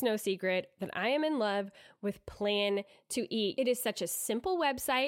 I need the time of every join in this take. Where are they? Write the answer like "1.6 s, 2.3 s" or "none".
3.5 s